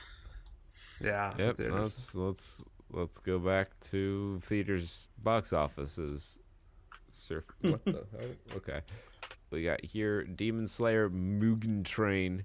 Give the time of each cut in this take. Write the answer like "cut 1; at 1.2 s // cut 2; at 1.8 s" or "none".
cut 1; at 1.4 s // cut 2; at 9.4 s